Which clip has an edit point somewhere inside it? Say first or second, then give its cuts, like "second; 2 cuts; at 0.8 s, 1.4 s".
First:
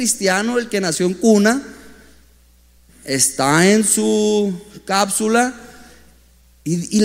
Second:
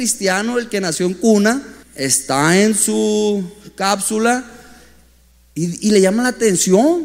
second; 1 cut; at 1.8 s